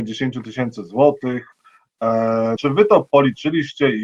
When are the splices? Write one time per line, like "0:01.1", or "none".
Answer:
0:02.6